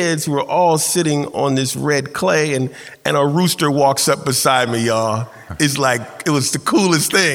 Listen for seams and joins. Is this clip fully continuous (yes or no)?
yes